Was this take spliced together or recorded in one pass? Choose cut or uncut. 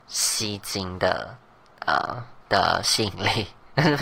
cut